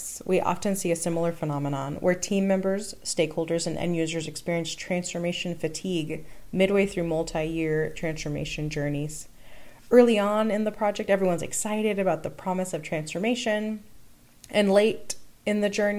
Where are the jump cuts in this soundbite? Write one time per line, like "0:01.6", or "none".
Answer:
none